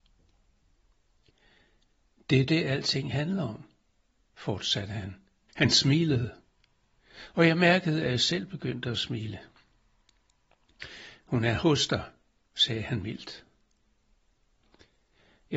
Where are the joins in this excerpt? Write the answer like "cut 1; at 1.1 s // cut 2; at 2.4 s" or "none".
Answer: cut 1; at 5.5 s